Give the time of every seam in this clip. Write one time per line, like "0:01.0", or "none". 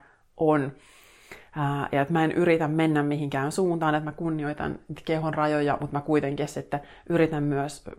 none